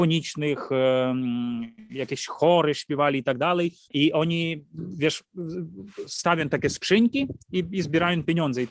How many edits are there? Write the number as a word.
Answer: one